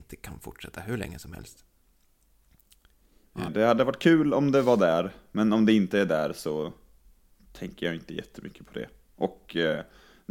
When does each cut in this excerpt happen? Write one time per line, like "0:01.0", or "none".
0:03.5